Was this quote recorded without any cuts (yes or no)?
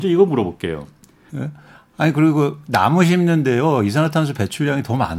no